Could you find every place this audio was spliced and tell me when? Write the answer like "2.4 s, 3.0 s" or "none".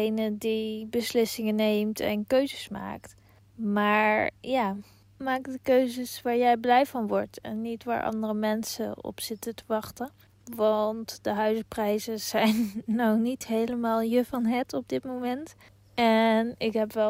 10.3 s